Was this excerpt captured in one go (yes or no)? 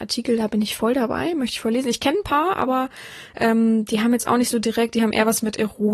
yes